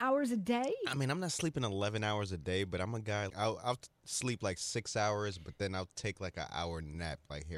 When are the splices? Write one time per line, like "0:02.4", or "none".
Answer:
0:03.3

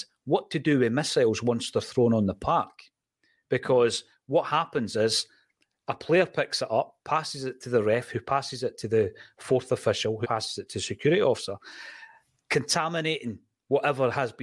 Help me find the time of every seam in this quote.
0:10.2

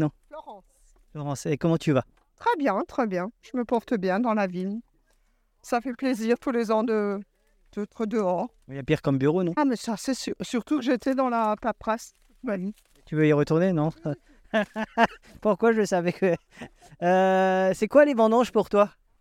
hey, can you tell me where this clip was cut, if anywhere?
0:09.6

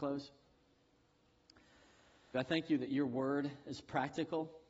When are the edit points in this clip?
0:02.3

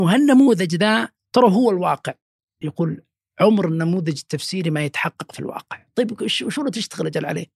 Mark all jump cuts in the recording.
0:02.6

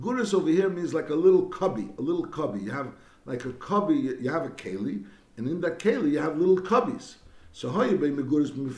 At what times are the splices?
none

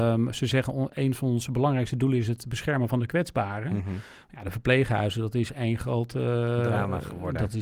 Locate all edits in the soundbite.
none

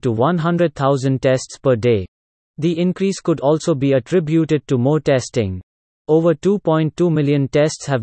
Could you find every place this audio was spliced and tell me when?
0:02.5

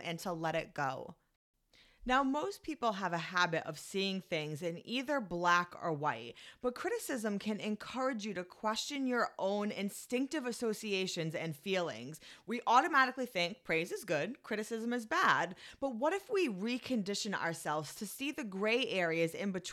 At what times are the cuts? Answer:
none

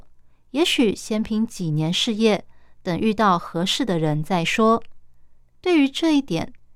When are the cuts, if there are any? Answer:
none

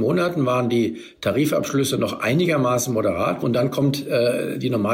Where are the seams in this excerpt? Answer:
0:03.4

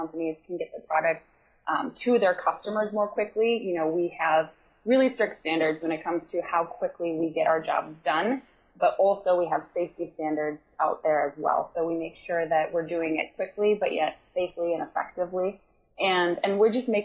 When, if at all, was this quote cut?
none

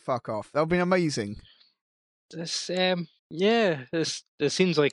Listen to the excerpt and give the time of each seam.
0:03.2

